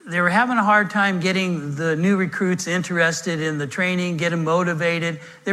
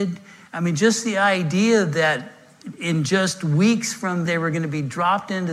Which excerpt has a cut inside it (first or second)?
second